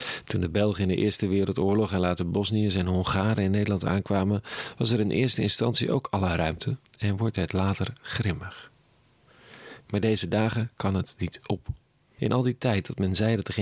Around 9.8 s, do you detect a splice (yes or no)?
yes